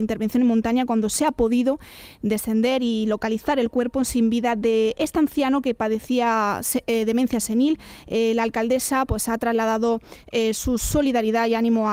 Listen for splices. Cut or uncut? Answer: uncut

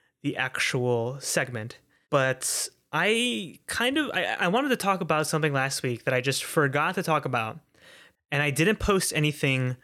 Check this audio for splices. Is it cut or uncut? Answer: cut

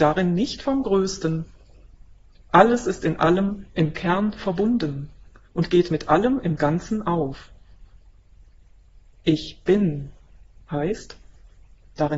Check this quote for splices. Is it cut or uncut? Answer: uncut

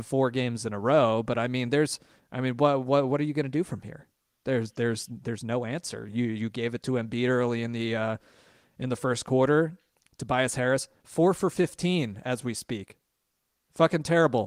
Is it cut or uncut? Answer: uncut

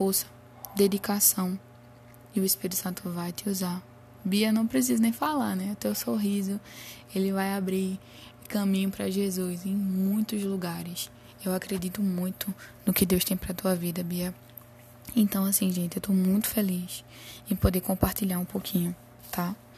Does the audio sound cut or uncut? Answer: uncut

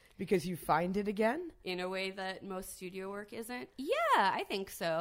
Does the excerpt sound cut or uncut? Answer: cut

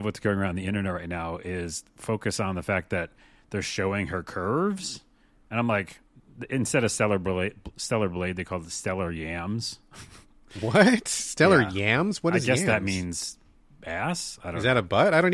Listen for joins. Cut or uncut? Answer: uncut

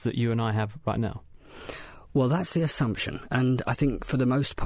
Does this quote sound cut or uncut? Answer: uncut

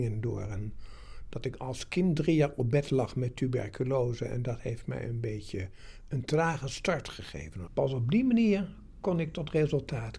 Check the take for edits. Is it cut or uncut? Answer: cut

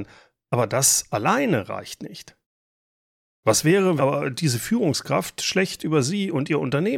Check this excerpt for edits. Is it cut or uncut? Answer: cut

